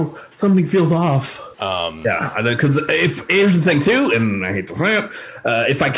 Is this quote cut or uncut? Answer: cut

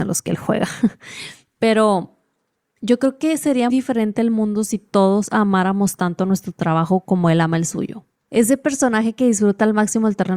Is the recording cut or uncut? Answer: cut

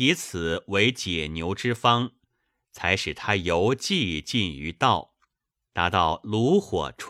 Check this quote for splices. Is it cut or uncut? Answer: uncut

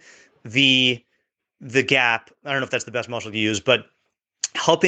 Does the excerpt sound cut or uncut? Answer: uncut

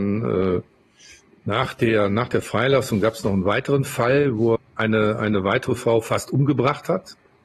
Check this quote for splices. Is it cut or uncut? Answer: cut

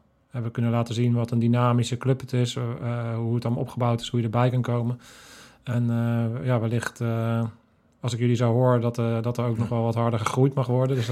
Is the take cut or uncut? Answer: uncut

